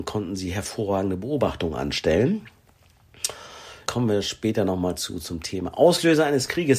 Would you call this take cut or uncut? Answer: cut